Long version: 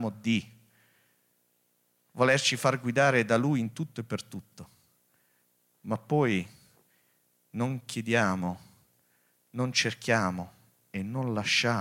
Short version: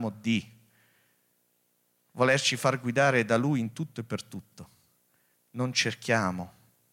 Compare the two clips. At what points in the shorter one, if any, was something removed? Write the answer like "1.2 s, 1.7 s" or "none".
5.3 s